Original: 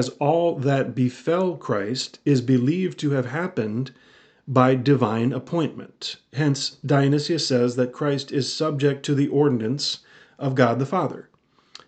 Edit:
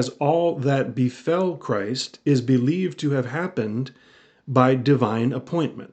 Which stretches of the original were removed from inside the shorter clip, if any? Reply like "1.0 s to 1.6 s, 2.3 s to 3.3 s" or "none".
none